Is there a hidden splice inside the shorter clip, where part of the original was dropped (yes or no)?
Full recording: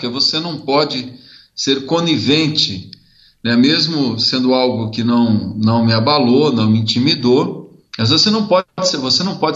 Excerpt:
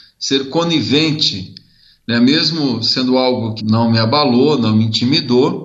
yes